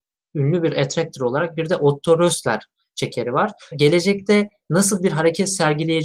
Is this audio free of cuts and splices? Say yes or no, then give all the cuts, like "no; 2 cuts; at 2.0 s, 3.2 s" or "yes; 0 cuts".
no; 1 cut; at 3.7 s